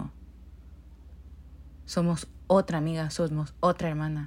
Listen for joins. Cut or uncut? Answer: uncut